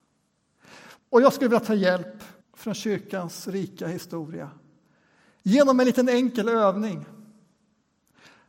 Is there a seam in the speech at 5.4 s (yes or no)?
no